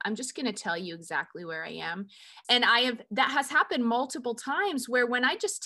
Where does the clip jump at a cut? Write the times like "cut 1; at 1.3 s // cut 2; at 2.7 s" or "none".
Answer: cut 1; at 2.4 s